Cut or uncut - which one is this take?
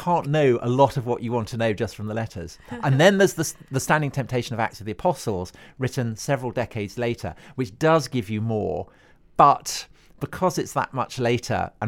uncut